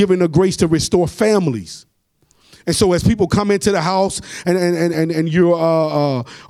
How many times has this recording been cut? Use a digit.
1